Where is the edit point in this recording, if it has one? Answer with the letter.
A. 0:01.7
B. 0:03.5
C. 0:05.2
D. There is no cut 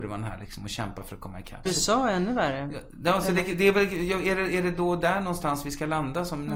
A